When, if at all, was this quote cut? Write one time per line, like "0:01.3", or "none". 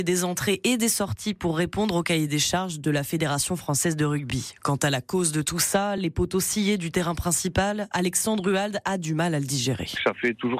none